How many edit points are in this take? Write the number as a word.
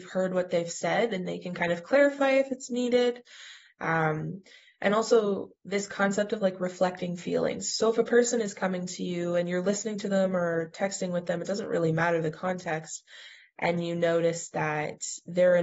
zero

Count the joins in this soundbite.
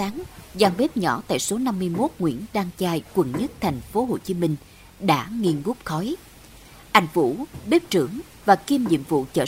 zero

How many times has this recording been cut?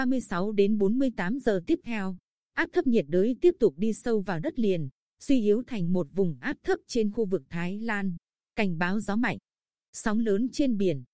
one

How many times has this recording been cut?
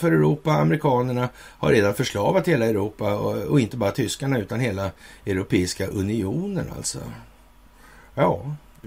zero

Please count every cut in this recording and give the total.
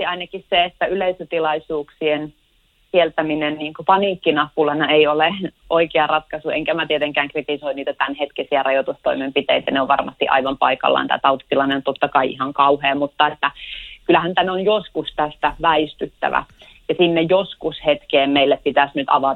zero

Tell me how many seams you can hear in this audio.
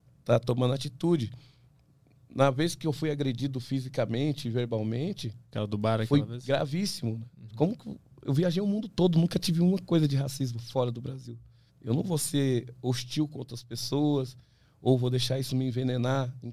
one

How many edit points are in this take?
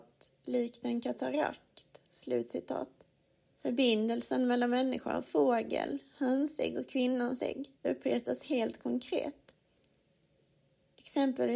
two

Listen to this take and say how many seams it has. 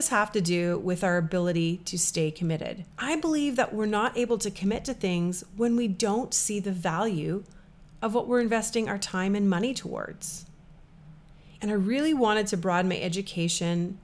two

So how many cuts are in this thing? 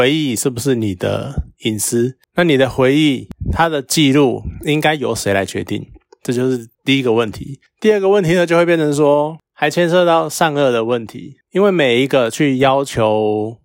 one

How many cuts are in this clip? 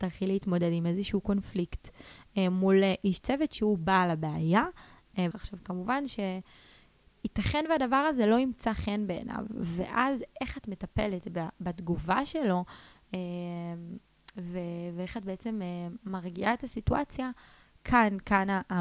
one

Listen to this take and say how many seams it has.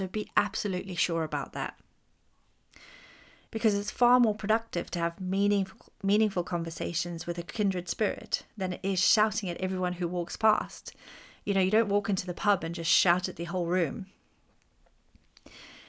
one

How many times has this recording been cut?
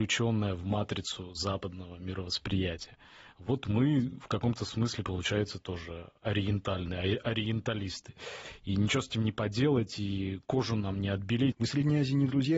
one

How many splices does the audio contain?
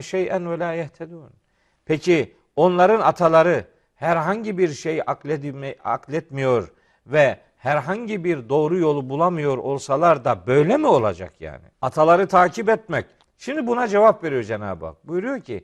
two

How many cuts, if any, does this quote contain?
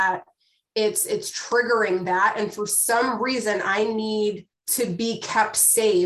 one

